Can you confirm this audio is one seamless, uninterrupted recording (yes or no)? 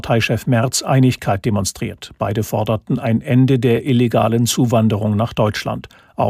yes